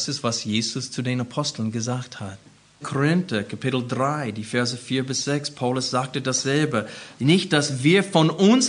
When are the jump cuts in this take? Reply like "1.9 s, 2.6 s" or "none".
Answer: 2.8 s, 7.2 s